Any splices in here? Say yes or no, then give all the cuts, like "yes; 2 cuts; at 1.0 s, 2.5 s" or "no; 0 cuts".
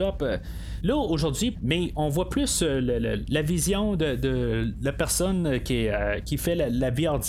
yes; 1 cut; at 1.5 s